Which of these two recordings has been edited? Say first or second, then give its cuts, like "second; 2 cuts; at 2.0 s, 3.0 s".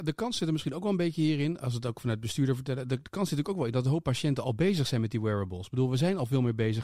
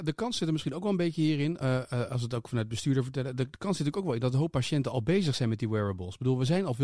first; 1 cut; at 1.6 s